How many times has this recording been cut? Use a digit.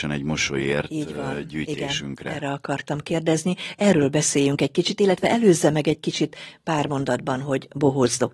0